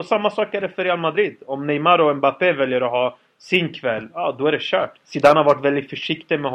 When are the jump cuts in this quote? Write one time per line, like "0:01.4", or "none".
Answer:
0:04.9